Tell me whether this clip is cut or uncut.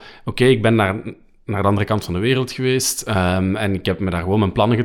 uncut